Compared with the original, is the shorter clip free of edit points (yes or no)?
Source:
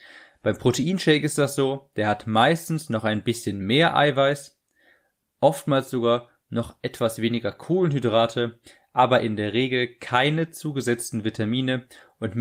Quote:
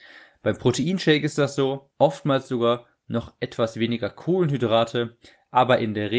no